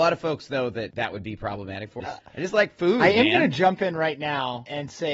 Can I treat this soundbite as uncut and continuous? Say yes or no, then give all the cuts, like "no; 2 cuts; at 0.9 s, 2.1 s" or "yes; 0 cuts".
no; 1 cut; at 2.0 s